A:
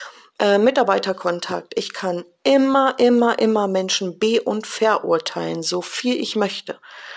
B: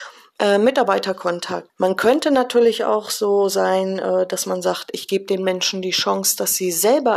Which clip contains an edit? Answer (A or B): B